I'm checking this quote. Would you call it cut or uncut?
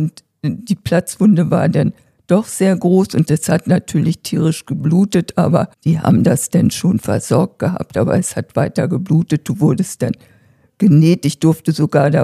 cut